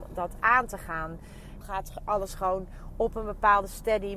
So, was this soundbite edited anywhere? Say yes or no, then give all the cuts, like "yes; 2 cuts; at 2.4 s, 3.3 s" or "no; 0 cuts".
yes; 1 cut; at 1.6 s